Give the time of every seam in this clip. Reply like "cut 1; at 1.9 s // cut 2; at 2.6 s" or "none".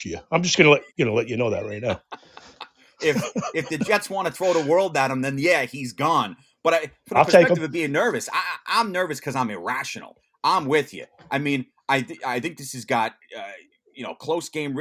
none